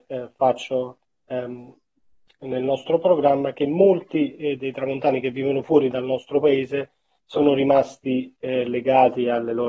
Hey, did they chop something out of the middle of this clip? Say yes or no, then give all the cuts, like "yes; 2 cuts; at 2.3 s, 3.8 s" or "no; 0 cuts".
no; 0 cuts